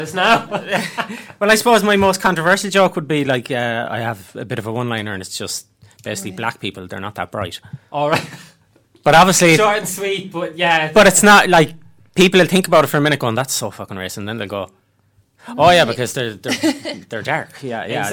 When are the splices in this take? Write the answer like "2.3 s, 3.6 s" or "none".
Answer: none